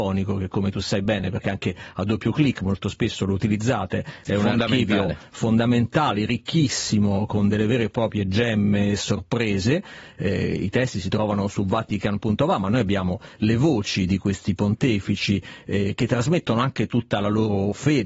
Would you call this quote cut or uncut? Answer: uncut